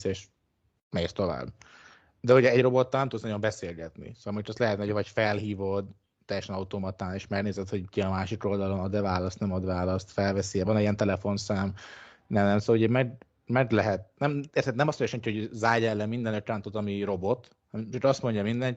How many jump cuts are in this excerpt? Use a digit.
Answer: 0